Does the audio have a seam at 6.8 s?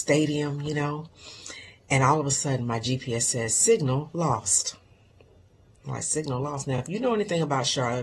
no; 0 cuts

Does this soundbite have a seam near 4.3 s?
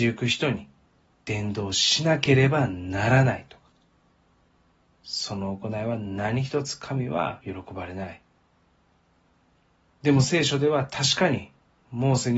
no; 0 cuts

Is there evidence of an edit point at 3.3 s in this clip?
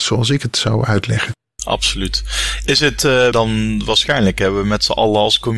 yes; 1 cut; at 3.3 s

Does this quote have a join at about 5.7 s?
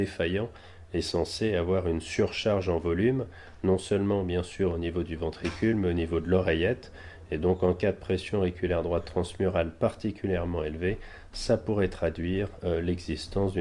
no; 0 cuts

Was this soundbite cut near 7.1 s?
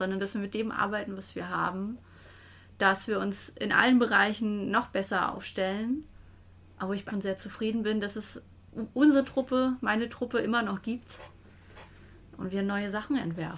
yes; 1 cut; at 7.1 s

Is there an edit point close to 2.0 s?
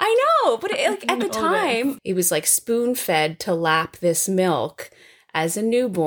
yes; 1 cut; at 2.0 s

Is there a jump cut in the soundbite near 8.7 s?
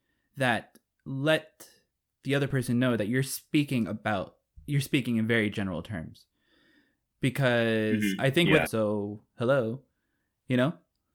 yes; 1 cut; at 8.7 s

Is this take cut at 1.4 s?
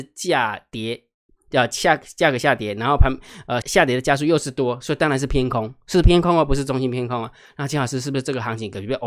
no; 1 cut; at 3.6 s

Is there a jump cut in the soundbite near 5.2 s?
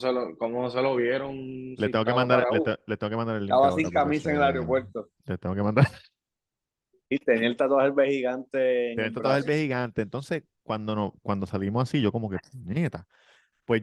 yes; 1 cut; at 5.2 s

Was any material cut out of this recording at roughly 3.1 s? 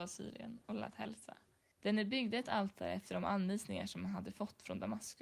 no; 1 cut; at 1.7 s

